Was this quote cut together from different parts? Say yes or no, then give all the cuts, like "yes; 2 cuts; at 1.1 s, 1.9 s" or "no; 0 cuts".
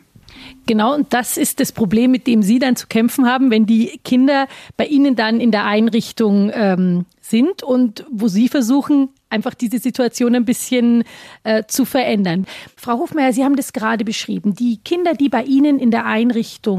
no; 0 cuts